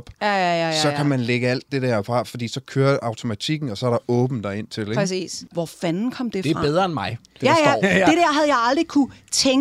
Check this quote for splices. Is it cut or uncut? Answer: cut